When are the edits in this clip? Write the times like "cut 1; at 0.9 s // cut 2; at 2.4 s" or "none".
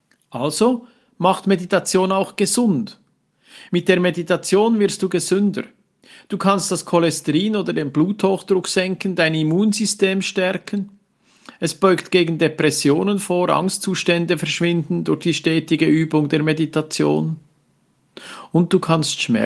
none